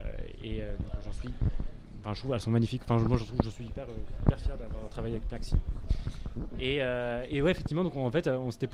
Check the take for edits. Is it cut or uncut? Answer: uncut